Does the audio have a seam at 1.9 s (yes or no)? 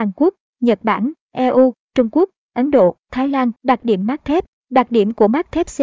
no